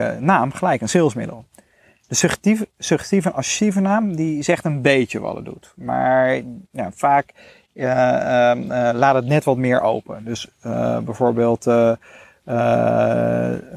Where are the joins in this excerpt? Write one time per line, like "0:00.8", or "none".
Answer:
none